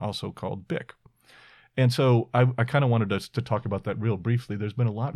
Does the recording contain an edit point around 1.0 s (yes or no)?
no